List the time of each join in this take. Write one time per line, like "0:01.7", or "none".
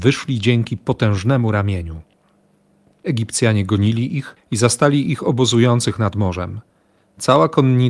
none